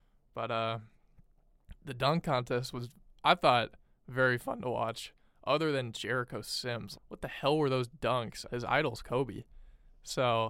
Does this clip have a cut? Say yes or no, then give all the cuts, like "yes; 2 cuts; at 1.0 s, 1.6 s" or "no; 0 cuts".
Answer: yes; 2 cuts; at 7.0 s, 8.5 s